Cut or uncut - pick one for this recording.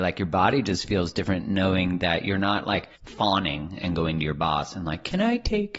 cut